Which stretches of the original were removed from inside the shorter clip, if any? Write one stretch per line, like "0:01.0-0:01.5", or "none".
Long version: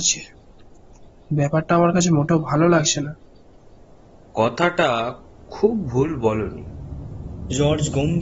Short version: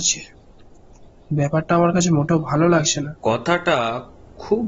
0:03.2-0:04.3